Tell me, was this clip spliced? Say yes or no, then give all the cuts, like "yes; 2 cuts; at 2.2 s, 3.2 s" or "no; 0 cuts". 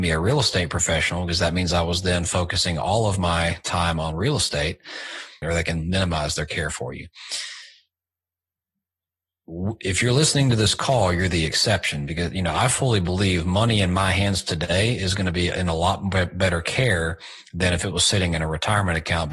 yes; 1 cut; at 5.4 s